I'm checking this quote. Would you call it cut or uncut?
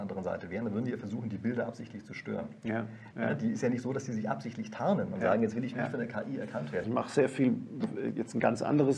cut